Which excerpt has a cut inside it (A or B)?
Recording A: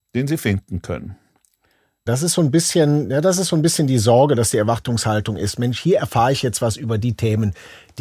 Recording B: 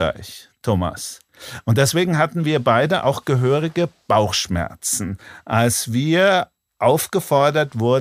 A